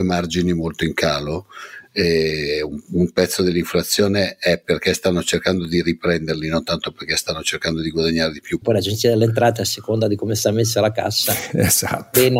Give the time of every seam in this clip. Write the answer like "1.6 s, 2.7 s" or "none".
8.6 s